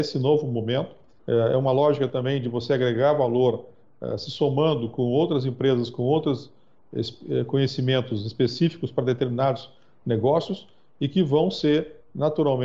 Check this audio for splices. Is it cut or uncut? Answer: cut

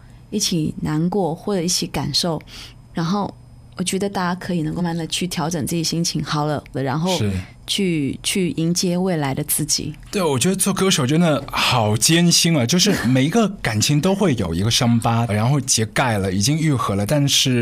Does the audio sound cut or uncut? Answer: cut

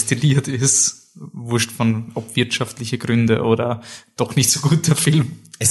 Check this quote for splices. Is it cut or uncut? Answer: uncut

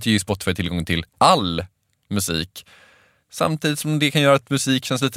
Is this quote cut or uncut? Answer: cut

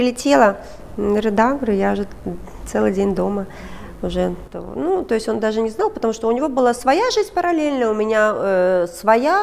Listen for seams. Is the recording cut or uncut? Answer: uncut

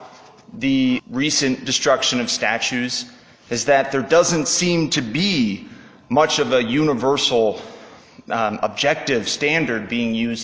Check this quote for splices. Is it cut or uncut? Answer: cut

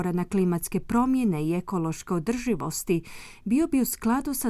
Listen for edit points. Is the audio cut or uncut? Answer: uncut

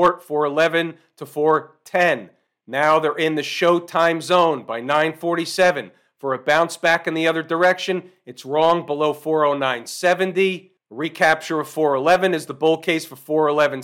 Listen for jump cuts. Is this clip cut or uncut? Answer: uncut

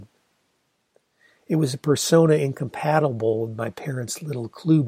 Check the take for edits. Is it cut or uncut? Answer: uncut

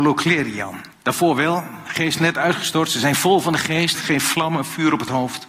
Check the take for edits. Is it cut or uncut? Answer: cut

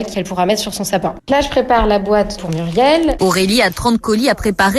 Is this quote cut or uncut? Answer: cut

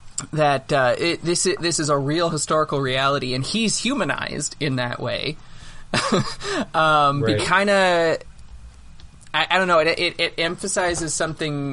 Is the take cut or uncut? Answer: cut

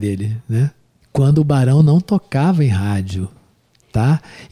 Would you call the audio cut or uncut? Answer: uncut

